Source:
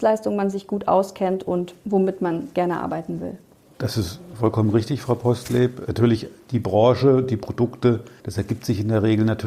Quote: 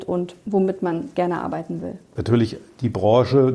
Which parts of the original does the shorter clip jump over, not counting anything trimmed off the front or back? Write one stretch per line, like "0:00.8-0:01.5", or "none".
0:03.5-0:05.9